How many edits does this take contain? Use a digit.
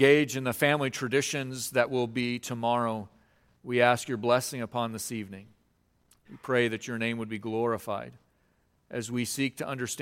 0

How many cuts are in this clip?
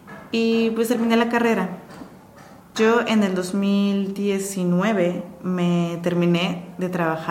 1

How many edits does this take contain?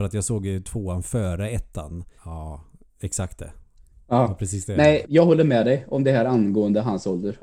2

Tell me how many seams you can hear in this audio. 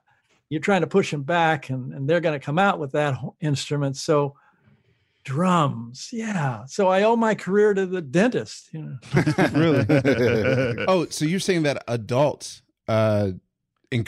0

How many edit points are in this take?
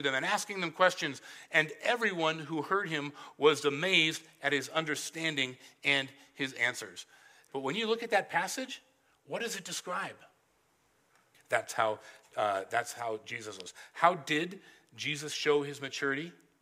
2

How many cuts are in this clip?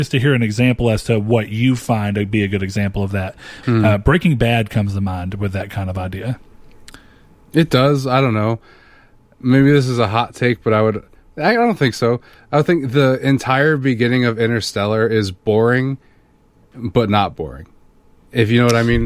1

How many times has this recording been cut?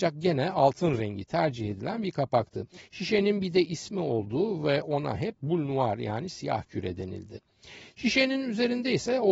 0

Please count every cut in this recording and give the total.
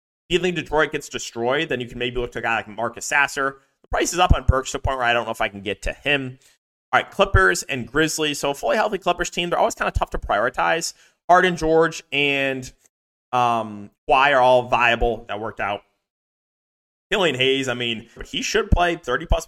2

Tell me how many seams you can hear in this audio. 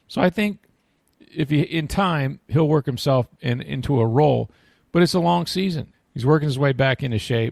2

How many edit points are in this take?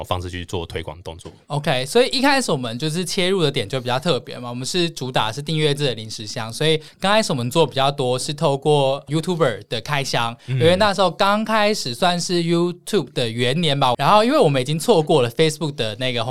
1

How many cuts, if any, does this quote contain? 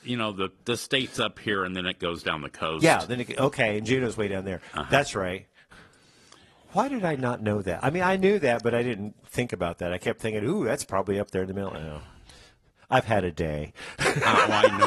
0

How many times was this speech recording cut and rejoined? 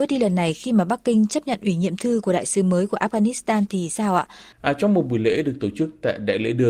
1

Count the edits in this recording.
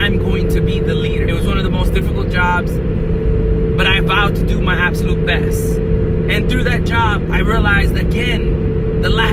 1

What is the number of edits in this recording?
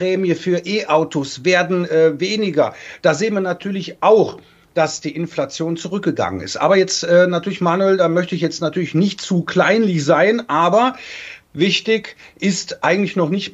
1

